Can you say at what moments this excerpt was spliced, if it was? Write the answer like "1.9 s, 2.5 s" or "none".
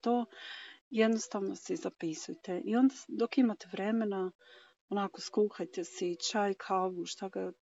none